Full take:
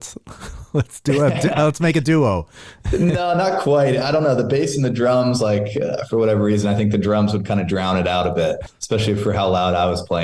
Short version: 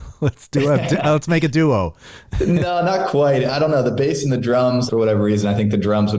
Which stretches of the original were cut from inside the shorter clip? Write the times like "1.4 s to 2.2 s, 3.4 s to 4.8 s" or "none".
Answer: 5.4 s to 6.1 s